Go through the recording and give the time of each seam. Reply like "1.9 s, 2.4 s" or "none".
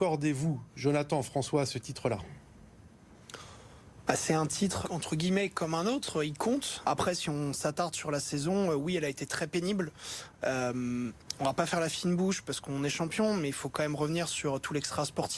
4.8 s, 6.8 s